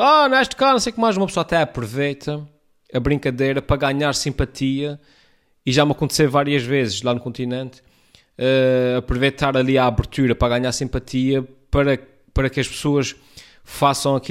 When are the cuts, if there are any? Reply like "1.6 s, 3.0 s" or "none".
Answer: none